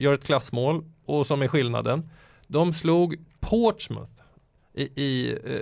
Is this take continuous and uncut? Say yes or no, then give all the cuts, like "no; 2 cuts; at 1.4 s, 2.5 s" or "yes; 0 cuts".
no; 1 cut; at 1.1 s